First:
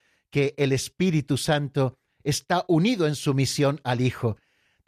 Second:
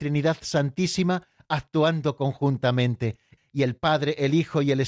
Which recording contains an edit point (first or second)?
second